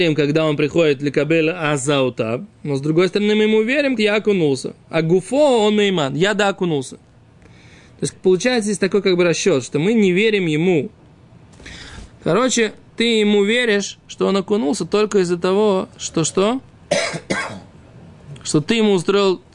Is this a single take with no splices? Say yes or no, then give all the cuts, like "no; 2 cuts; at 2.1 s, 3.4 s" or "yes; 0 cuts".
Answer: no; 3 cuts; at 4.0 s, 8.1 s, 12.1 s